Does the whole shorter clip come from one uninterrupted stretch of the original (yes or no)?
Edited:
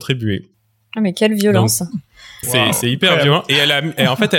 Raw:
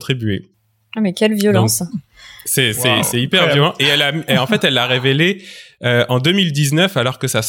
no